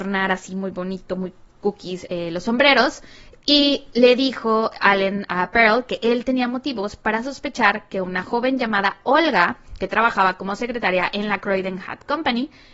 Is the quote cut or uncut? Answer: uncut